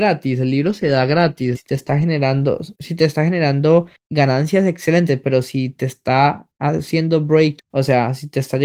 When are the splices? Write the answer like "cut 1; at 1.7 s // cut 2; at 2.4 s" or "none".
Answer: cut 1; at 1.5 s // cut 2; at 7.6 s